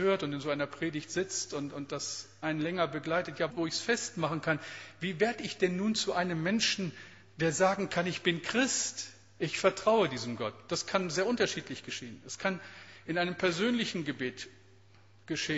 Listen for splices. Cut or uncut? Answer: cut